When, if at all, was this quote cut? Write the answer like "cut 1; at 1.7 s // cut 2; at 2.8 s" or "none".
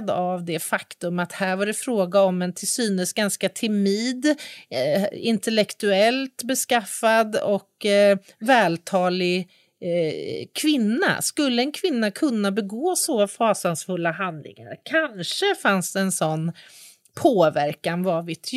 none